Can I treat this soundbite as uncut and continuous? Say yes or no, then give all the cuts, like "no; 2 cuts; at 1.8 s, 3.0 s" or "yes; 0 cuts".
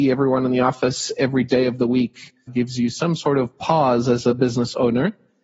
no; 1 cut; at 2.5 s